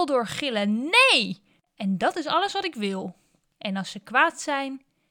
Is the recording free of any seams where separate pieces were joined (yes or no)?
no